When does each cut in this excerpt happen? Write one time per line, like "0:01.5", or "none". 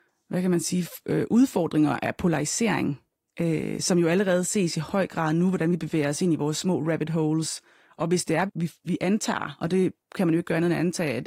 0:08.5